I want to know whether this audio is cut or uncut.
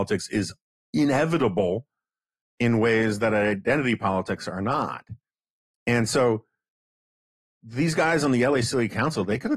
uncut